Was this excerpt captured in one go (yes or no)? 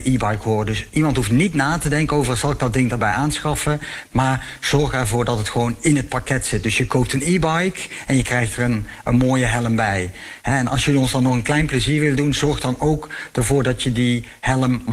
yes